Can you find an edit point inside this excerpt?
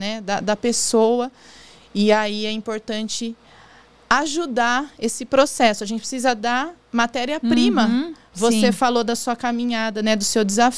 yes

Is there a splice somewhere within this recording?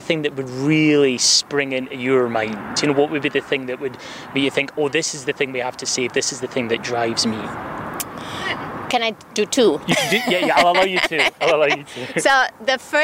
no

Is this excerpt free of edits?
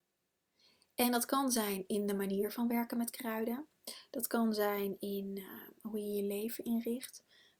yes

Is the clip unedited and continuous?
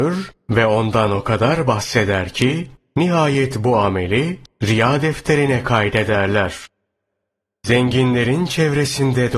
yes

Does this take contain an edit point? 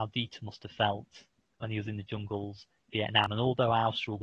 no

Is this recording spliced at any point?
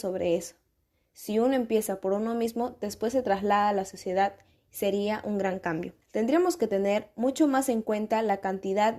yes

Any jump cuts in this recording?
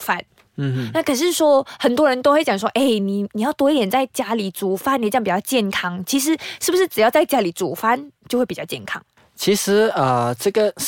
no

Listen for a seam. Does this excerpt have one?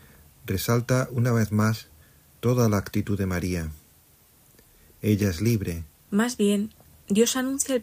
yes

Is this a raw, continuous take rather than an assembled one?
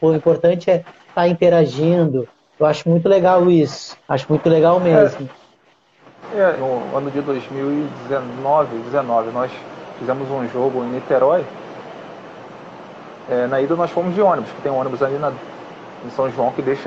no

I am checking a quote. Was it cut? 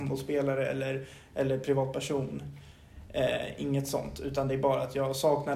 no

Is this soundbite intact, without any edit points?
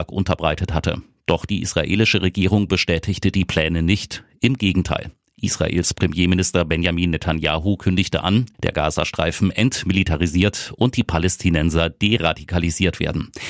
no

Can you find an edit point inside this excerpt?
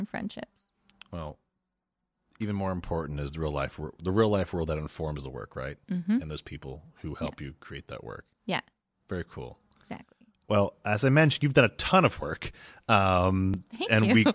no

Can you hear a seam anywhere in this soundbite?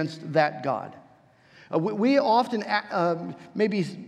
no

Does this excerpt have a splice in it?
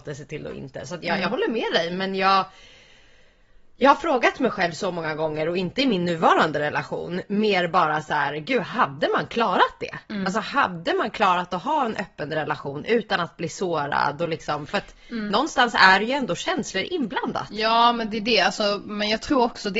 no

